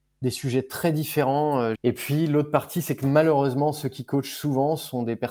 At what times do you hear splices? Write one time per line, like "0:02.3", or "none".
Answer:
0:01.8